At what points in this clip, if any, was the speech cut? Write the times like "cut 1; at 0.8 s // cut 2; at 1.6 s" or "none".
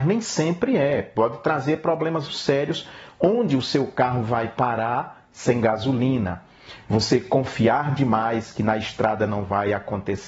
cut 1; at 2.3 s // cut 2; at 6.8 s